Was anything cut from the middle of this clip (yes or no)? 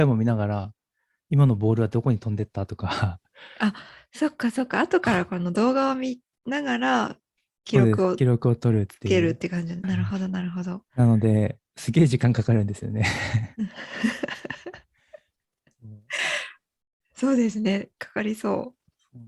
yes